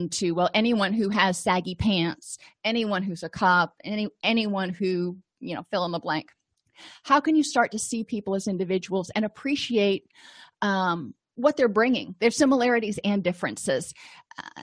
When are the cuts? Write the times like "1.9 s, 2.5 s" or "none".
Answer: none